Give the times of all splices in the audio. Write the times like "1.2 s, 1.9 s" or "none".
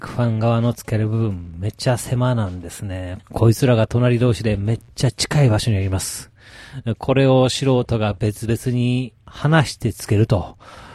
3.2 s